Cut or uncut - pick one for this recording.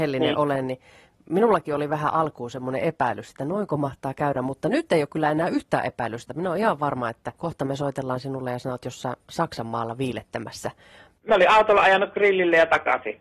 cut